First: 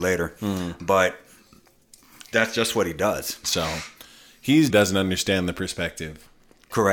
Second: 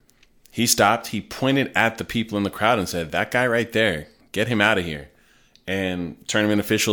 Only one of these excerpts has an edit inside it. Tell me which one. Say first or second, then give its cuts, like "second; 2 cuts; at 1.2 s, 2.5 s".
first; 2 cuts; at 3.4 s, 4.7 s